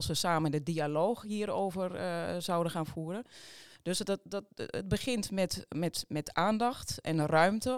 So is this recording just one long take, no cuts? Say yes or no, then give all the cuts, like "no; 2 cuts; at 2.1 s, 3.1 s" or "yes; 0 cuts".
yes; 0 cuts